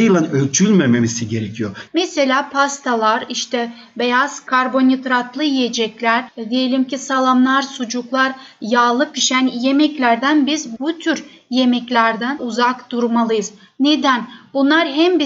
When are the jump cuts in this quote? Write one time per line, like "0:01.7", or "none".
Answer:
0:01.9